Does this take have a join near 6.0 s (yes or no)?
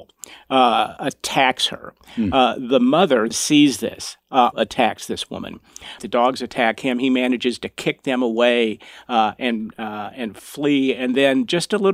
yes